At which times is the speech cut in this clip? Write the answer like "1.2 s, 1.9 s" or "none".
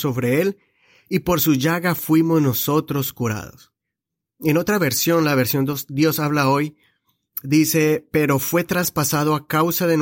none